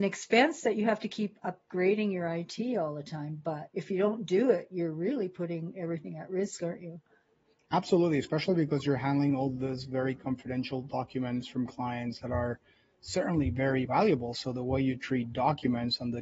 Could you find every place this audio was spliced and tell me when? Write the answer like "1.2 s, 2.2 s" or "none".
12.2 s, 13.9 s

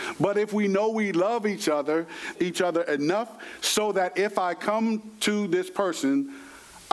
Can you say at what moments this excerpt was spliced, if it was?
2.3 s

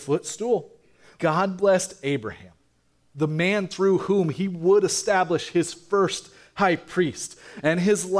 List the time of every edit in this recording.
1.2 s

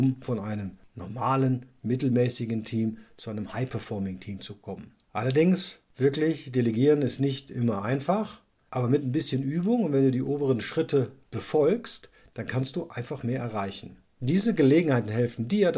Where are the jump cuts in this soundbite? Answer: 14.2 s

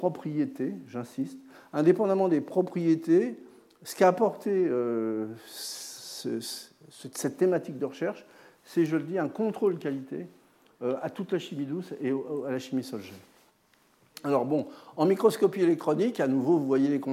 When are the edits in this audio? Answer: none

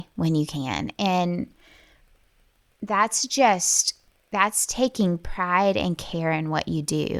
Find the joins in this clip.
none

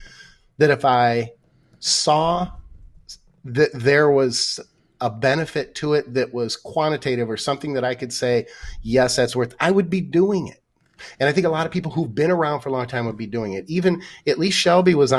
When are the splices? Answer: none

